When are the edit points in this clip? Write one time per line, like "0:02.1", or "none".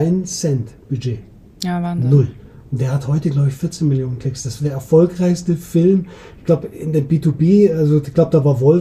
none